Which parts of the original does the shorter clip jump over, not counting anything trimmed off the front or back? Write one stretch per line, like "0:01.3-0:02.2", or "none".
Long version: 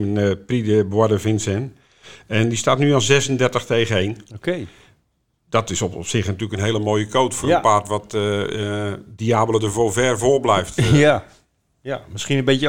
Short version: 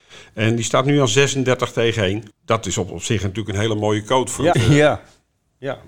0:04.2-0:05.3
0:07.6-0:10.8